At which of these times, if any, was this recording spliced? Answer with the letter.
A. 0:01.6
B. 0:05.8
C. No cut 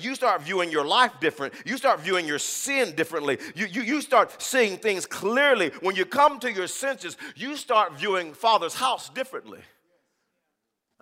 C